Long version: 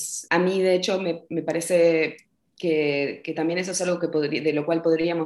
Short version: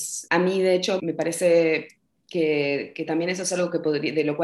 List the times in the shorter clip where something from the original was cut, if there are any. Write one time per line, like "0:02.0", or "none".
0:01.0

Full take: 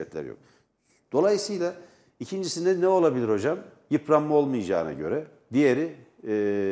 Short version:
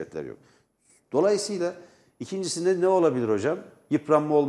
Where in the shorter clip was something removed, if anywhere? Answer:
none

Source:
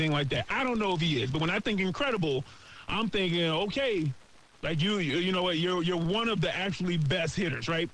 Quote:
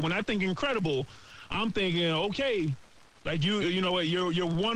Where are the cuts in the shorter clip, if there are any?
0:03.6

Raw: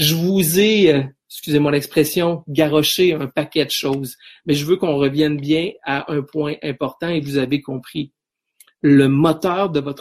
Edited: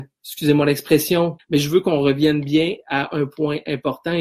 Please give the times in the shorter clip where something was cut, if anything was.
0:01.4

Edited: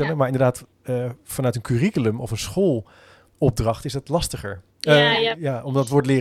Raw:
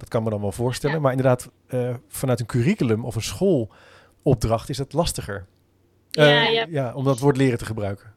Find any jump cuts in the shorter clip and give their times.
0:04.7

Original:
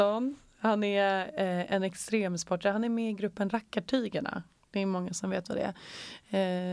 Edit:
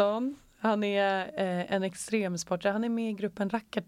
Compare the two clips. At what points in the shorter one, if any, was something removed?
none

